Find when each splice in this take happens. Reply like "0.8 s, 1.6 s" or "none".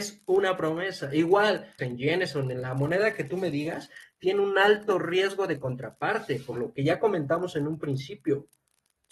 1.8 s